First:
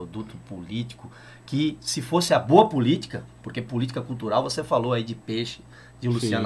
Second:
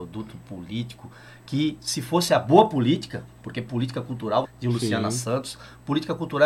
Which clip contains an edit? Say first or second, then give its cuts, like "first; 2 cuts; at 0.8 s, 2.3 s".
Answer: second; 1 cut; at 4.4 s